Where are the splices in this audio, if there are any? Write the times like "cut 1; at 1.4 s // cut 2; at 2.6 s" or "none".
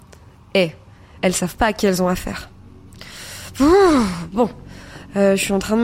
cut 1; at 1.2 s

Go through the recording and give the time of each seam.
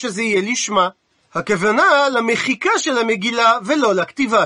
cut 1; at 1.2 s

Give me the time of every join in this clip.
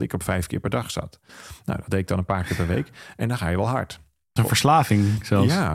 cut 1; at 4.4 s

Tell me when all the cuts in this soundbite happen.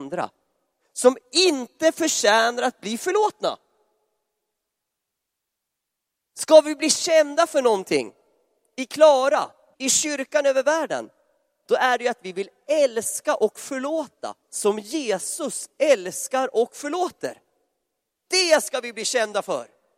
cut 1; at 9.7 s

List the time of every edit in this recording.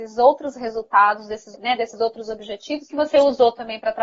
cut 1; at 1.5 s // cut 2; at 2.9 s

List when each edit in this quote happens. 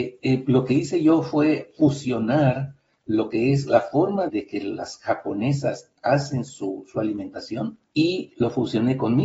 cut 1; at 4.3 s // cut 2; at 7.8 s

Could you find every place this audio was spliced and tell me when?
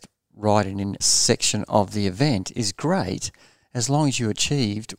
cut 1; at 1.0 s

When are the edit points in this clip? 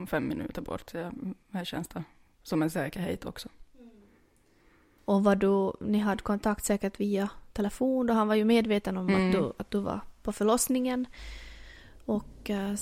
none

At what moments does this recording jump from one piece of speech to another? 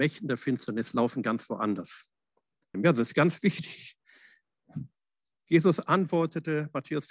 cut 1; at 2.7 s

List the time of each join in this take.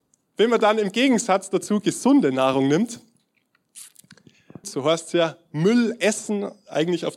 cut 1; at 4.6 s

